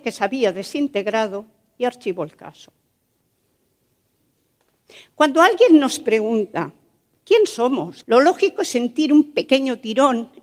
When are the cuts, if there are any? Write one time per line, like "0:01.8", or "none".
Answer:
0:08.0